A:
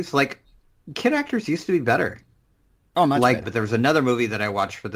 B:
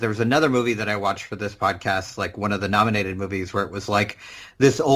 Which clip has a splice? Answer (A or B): A